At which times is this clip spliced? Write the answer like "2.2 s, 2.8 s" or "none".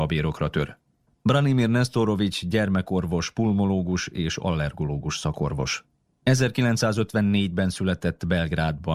none